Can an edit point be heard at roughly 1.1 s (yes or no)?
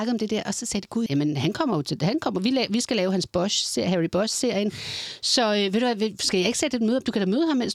yes